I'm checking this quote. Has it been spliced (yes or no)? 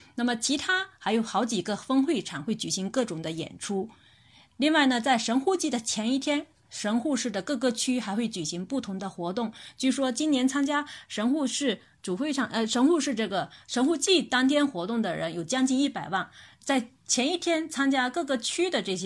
no